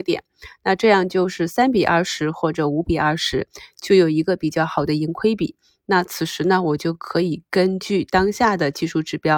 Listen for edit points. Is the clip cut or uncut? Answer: uncut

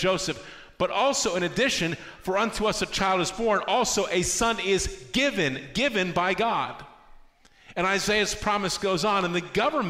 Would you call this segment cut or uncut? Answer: uncut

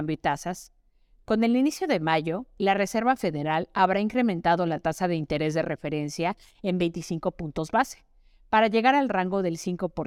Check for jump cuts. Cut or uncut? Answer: uncut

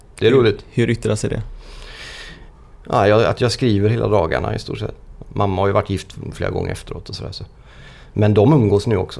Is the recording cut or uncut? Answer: cut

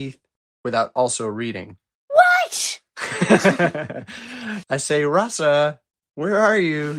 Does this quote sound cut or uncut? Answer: uncut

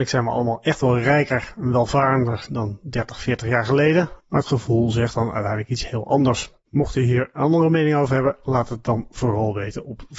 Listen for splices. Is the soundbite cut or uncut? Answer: uncut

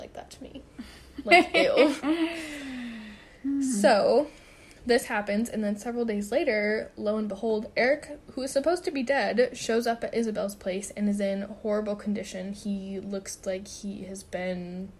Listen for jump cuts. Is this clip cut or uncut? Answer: uncut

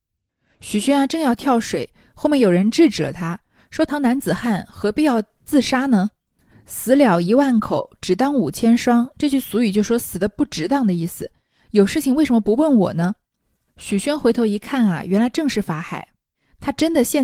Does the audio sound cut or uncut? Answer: cut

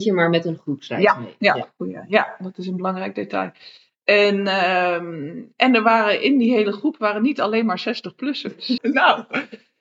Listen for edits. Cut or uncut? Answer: cut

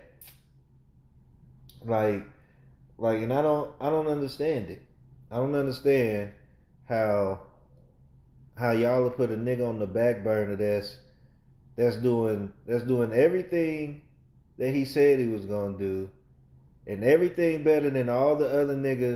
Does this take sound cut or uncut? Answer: uncut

